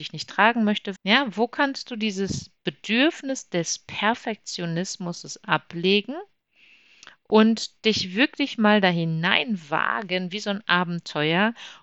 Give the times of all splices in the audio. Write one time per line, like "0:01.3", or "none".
0:01.0